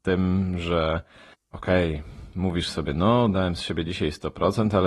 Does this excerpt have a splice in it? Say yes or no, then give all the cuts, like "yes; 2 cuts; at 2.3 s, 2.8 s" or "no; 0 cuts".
no; 0 cuts